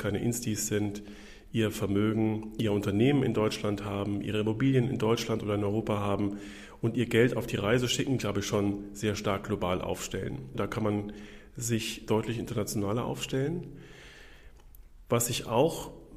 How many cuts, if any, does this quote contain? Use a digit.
3